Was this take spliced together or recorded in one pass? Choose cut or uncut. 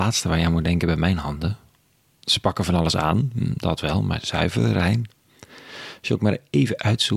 uncut